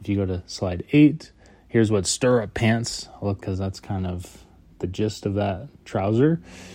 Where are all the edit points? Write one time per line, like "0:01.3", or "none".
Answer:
0:03.4